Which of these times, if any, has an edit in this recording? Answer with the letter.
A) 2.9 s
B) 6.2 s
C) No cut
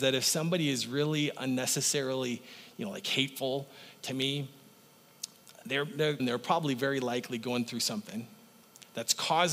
B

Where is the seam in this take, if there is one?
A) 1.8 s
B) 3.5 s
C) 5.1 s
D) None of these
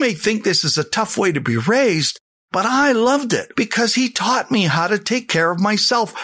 B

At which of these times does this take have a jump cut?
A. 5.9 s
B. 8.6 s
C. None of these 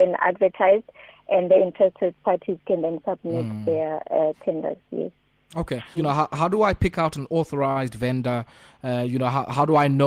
A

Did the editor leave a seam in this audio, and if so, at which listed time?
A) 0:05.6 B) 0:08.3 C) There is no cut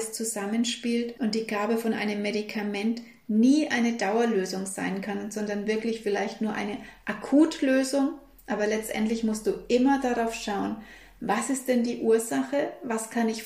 C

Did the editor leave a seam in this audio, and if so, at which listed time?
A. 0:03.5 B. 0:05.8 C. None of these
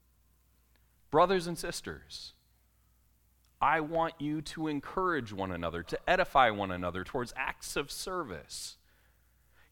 B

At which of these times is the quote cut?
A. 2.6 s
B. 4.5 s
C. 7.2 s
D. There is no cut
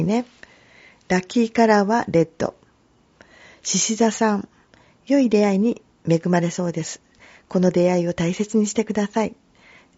D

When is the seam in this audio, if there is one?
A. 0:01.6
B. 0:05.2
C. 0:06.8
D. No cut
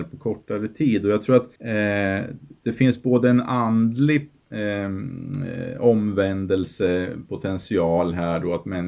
A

